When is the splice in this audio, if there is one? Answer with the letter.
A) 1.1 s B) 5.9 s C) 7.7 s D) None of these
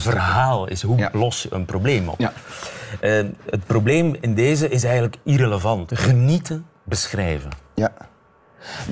B